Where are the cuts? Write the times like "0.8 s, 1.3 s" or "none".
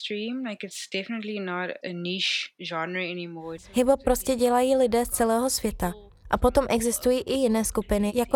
3.6 s